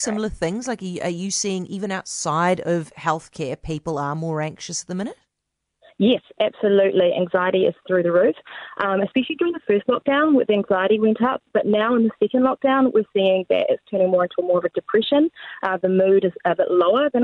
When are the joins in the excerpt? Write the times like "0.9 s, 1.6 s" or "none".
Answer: none